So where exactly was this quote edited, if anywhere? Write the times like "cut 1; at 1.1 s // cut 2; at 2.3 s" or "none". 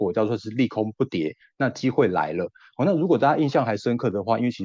none